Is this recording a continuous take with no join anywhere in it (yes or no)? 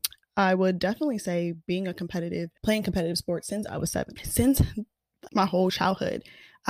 no